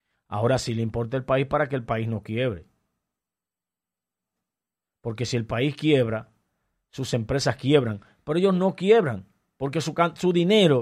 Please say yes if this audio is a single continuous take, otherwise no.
yes